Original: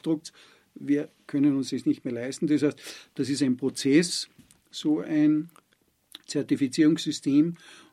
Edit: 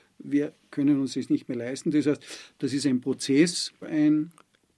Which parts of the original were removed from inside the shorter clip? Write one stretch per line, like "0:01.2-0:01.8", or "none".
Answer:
0:04.4-0:05.0